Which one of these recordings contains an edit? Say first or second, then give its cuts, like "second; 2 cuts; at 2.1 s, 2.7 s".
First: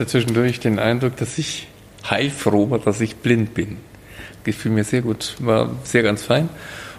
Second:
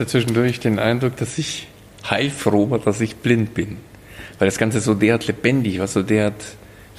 first; 1 cut; at 4.4 s